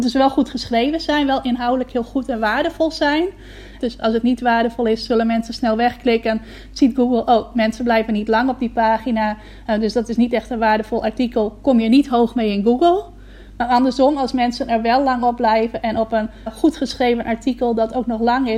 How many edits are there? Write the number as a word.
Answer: two